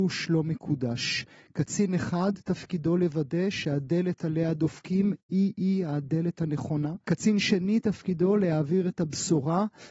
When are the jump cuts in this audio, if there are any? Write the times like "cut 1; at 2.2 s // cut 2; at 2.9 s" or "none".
cut 1; at 7.0 s